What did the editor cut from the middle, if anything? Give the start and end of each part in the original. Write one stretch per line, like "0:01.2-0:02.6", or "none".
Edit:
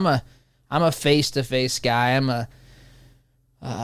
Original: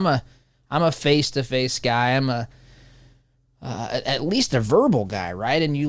none